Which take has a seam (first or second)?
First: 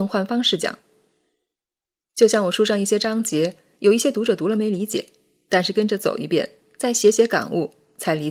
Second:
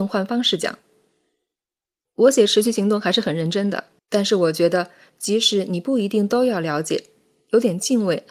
second